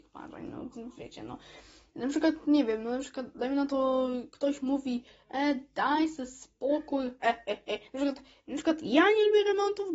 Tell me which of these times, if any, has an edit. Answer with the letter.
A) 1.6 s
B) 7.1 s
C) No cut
C